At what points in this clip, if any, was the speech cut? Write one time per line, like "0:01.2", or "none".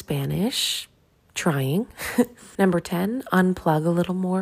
0:02.6